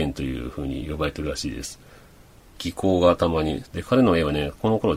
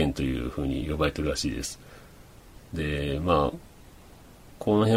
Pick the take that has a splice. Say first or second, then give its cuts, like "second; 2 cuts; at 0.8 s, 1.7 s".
first; 2 cuts; at 2.5 s, 3.6 s